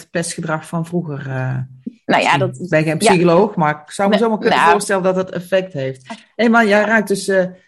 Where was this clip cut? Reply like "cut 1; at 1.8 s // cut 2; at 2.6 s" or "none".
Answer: none